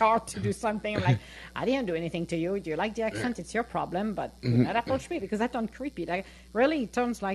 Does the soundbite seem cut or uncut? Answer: uncut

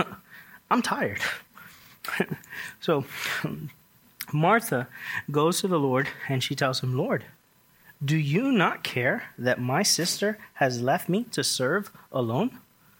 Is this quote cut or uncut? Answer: uncut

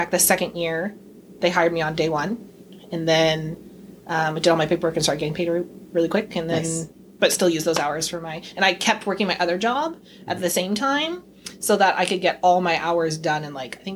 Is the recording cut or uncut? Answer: uncut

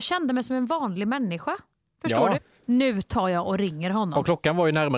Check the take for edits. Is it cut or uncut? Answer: cut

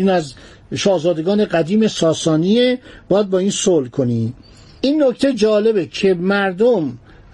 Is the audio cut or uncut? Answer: uncut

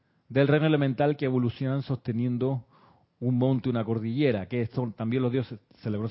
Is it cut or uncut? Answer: uncut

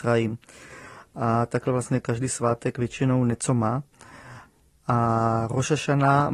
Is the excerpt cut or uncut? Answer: uncut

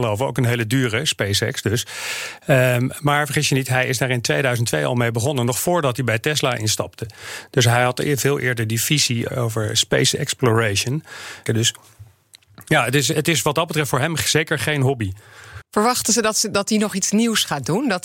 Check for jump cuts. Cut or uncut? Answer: cut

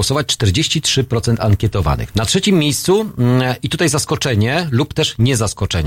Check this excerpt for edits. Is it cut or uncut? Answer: cut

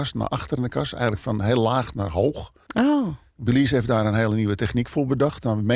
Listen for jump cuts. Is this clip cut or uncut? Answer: cut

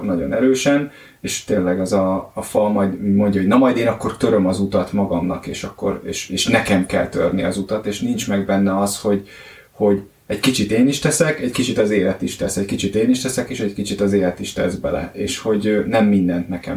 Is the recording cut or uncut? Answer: uncut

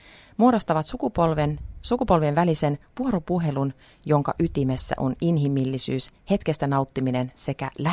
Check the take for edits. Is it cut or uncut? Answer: uncut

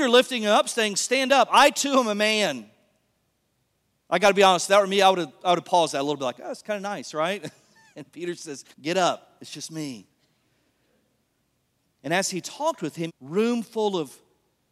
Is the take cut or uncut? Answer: cut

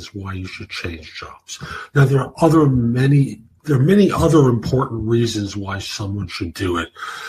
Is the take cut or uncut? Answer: uncut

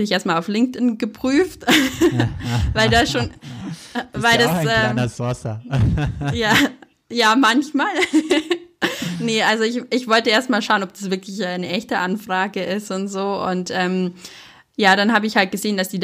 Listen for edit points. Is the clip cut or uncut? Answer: uncut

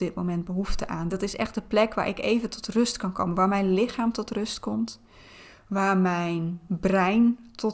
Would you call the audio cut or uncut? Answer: uncut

